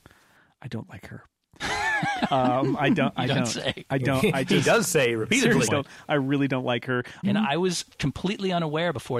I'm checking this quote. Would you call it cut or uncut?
cut